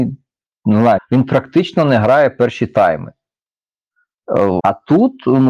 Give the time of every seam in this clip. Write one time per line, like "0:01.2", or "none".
0:01.0
0:04.6